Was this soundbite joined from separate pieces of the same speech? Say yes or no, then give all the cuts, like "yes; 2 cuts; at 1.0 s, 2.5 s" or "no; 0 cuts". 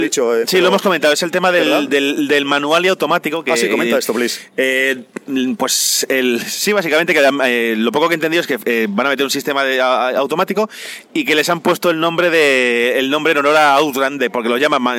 no; 0 cuts